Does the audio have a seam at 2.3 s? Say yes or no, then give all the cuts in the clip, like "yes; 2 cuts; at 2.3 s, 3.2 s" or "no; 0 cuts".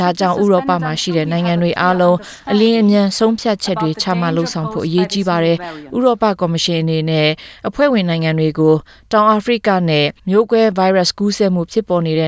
no; 1 cut; at 10.2 s